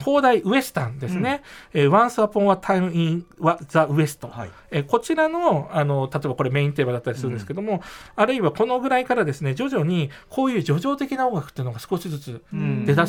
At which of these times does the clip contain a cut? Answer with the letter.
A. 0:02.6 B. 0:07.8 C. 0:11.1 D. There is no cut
D